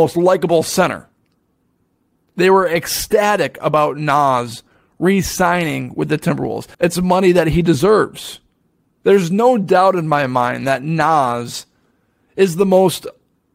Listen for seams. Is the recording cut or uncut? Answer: cut